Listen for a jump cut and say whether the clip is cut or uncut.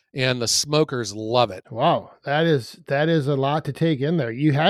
cut